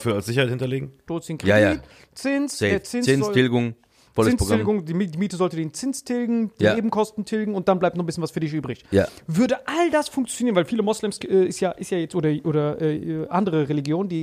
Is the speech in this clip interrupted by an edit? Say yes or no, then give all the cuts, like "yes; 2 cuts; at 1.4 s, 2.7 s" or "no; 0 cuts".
yes; 1 cut; at 1.1 s